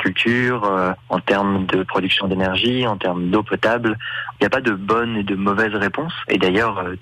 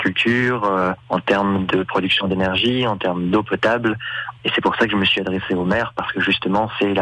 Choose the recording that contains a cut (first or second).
first